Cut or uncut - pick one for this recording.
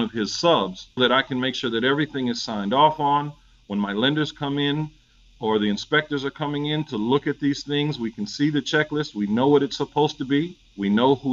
cut